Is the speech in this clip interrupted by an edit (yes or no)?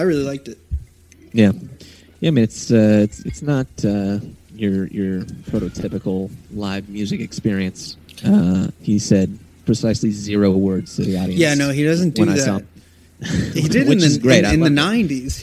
no